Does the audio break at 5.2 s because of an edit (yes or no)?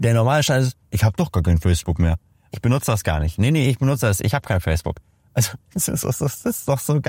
no